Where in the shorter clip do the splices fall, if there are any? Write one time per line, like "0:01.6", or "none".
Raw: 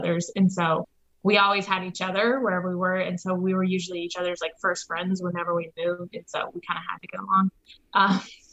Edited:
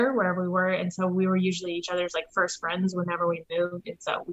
none